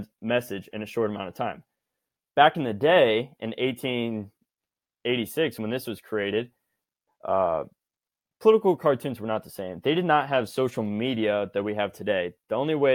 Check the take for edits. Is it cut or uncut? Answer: uncut